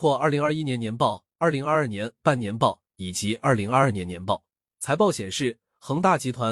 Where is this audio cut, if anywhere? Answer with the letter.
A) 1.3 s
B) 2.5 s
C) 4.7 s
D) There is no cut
D